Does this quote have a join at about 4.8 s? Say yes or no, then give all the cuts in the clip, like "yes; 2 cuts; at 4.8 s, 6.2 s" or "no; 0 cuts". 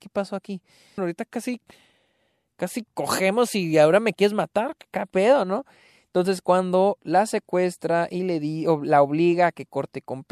no; 1 cut; at 1.0 s